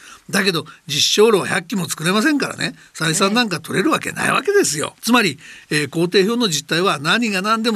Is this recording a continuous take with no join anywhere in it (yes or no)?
no